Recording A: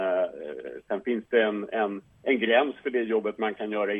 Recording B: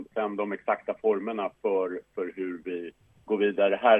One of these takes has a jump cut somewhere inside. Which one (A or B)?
A